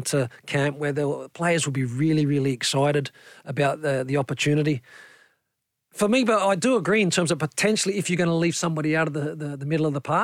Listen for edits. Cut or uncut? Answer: uncut